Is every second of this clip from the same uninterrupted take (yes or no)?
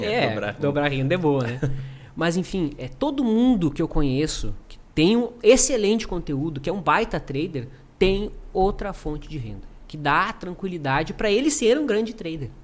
yes